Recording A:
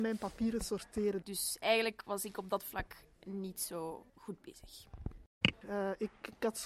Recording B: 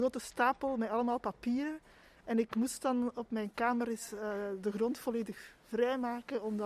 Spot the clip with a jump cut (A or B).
A